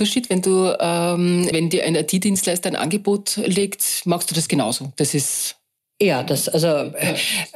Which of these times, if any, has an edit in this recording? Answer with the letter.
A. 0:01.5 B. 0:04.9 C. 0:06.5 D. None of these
A